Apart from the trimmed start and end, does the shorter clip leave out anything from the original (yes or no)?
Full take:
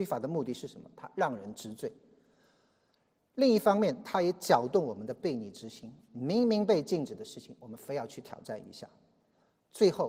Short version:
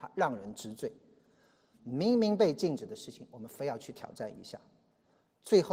yes